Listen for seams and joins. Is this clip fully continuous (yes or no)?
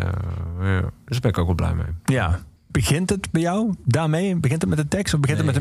no